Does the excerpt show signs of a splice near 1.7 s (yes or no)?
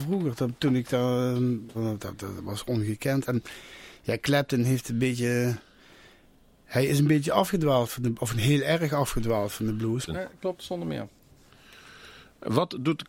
yes